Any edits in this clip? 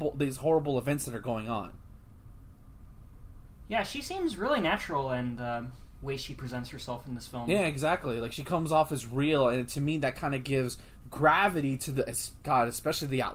no; 0 cuts

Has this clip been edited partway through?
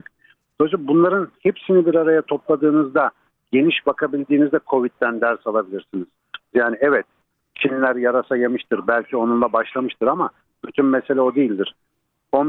yes; 1 cut; at 6.5 s

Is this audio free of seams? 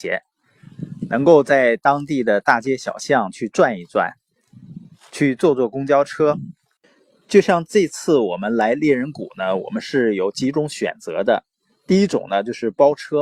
yes; 0 cuts

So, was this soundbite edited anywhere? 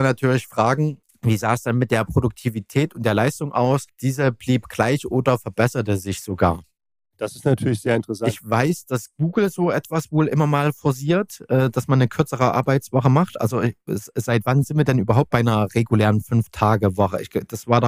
no; 0 cuts

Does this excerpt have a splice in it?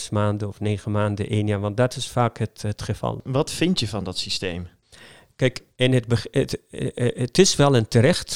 no; 0 cuts

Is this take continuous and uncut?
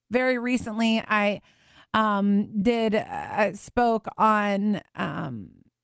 yes; 0 cuts

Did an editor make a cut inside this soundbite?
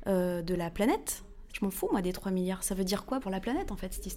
yes; 2 cuts; at 1.5 s, 3.2 s

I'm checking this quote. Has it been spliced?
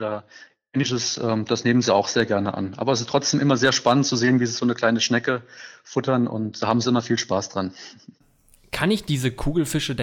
no; 0 cuts

